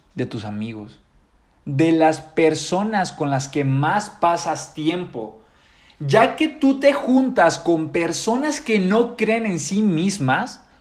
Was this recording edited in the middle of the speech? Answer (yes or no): no